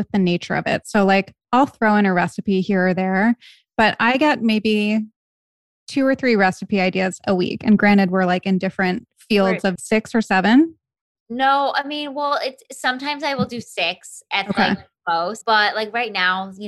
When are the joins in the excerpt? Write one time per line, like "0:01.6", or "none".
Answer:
0:09.8